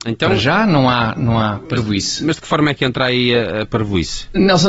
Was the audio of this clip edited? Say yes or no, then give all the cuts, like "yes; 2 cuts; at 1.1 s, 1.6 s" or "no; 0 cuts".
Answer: no; 0 cuts